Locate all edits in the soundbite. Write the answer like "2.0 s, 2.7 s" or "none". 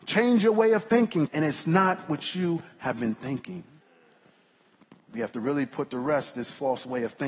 1.3 s